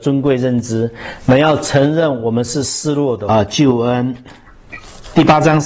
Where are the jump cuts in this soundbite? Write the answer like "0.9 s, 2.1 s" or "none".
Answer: 3.3 s

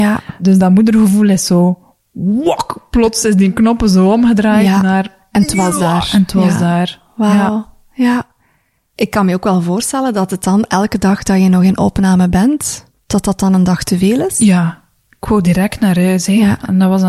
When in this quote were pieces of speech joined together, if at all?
none

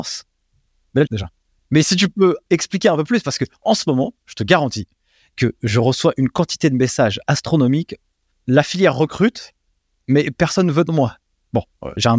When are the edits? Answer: 1.1 s

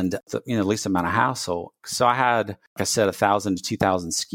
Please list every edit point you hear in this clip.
1.8 s

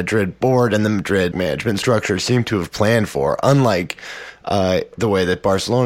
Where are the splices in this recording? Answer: 1.3 s

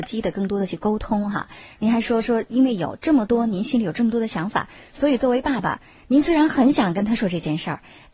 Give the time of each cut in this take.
7.2 s

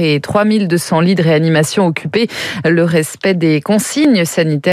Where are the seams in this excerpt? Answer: none

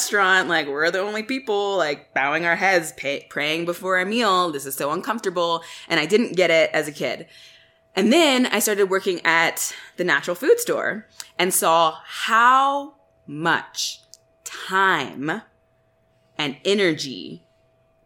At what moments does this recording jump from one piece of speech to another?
none

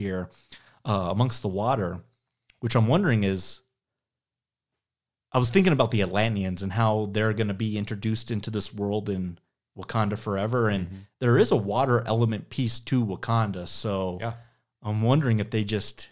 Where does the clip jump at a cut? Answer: none

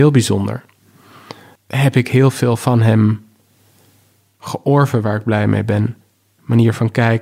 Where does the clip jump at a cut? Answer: 1.6 s

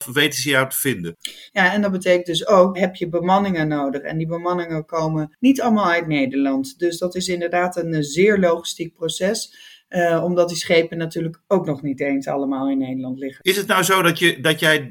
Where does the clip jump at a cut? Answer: 1.5 s, 2.7 s

